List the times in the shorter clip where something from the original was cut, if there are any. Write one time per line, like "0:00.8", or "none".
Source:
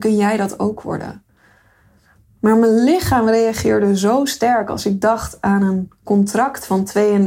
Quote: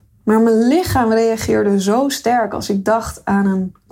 none